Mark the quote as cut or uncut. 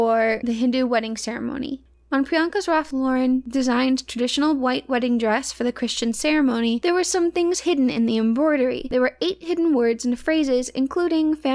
cut